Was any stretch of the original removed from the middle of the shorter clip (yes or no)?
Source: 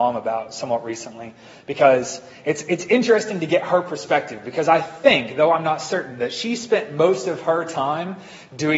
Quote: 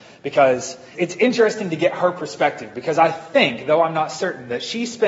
yes